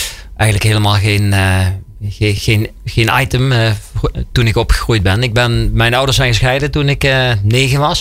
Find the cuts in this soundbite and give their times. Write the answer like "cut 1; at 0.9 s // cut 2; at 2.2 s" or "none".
none